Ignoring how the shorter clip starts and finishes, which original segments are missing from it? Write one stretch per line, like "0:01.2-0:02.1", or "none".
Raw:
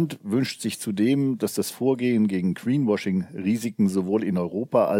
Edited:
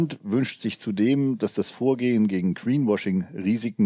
none

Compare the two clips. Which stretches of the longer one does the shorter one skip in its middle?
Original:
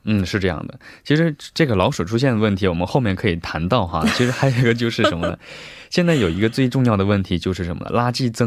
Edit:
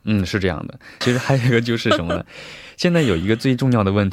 0:01.0-0:04.1

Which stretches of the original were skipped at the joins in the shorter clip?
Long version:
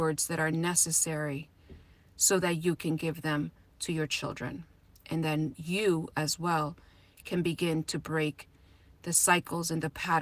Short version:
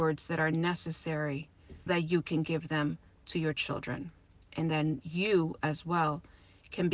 0:01.9-0:02.4

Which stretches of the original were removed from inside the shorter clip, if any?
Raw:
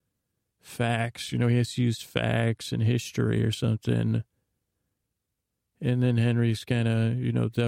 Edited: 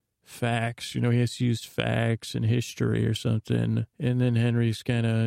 0:04.3-0:05.7

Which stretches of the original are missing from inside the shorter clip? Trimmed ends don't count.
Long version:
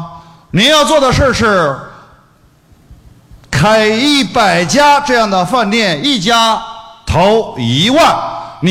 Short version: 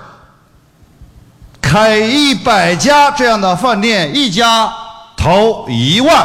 none

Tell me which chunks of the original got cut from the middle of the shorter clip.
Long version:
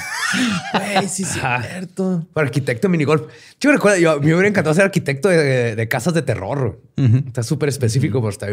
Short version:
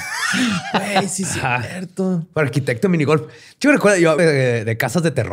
0:04.2-0:05.3

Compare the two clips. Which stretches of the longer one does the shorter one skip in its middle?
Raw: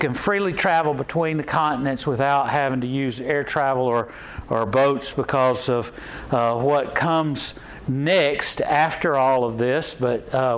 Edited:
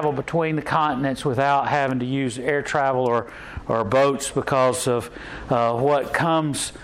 none

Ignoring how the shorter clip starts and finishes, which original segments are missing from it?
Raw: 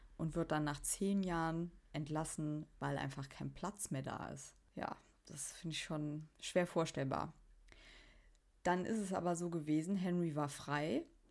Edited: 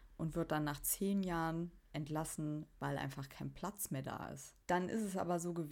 0:04.6-0:08.6

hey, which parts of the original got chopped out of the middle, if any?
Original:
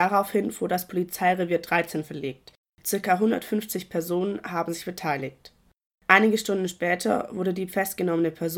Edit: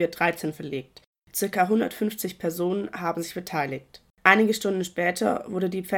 0:05.6-0:05.9

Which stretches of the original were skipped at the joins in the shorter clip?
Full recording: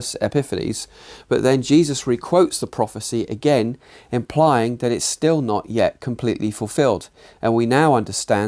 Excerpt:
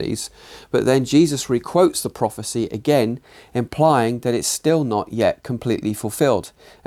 none

